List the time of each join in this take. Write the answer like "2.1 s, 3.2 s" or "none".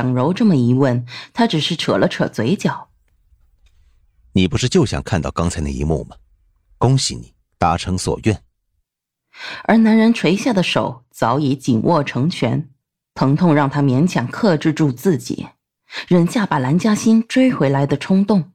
13.0 s